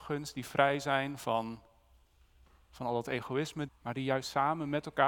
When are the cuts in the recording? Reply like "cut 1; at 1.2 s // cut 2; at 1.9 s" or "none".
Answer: cut 1; at 3.7 s